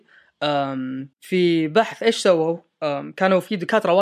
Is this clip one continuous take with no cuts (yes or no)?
no